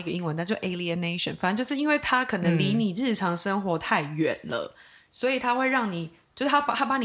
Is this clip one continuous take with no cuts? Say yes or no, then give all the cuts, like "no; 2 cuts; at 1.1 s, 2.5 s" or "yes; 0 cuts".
yes; 0 cuts